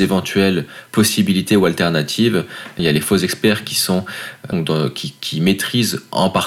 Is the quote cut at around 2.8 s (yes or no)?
yes